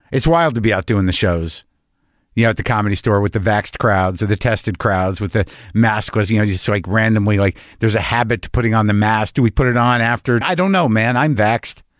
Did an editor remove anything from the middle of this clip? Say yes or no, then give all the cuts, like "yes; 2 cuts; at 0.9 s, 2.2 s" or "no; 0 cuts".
yes; 1 cut; at 10.4 s